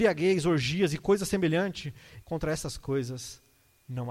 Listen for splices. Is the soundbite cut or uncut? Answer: cut